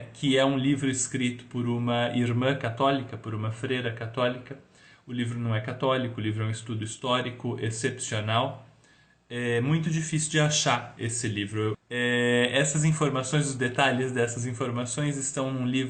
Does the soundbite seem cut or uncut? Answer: cut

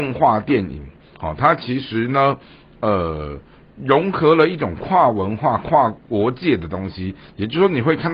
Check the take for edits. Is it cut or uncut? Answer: uncut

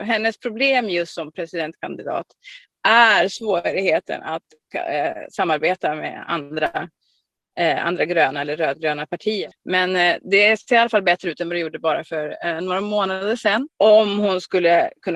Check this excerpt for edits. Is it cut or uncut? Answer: cut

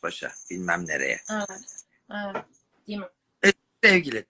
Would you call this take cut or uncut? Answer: uncut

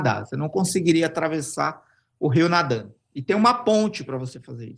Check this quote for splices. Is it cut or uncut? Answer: uncut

